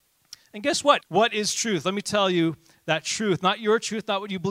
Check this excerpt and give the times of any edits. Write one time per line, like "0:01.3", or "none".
0:01.0

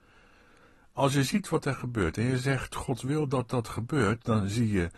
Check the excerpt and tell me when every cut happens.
none

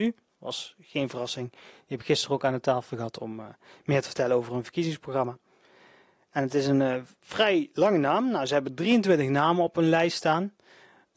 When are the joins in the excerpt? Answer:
none

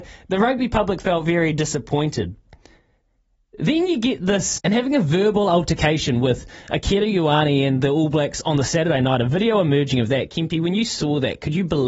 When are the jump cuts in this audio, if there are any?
0:04.6

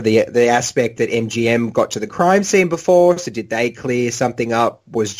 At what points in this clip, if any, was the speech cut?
none

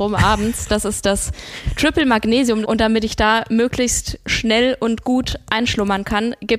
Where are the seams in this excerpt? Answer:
0:02.6

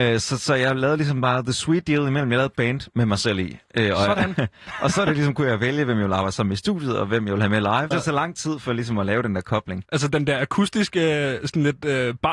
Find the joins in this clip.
0:07.9
0:09.8

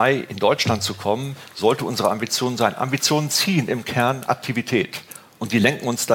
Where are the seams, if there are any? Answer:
none

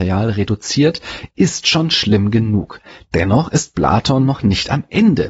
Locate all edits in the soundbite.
none

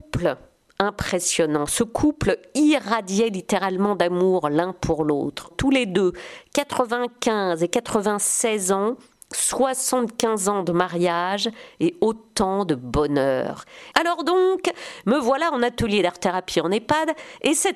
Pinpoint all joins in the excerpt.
0:05.5
0:13.9

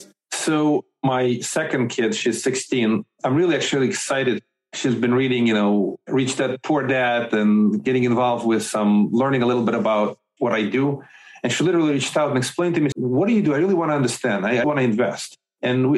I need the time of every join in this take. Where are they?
0:12.9
0:14.6

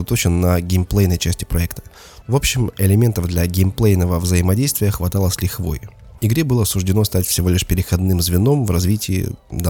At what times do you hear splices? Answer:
0:02.2
0:06.2

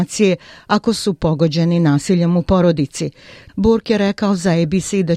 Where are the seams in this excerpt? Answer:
0:03.5

